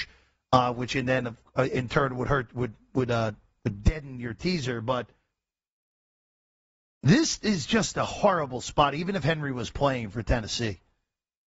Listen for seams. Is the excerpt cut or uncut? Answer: uncut